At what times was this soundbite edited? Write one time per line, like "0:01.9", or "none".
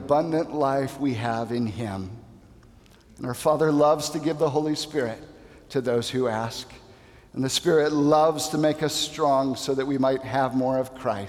none